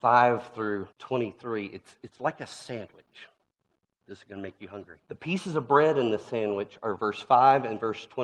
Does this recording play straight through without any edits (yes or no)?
no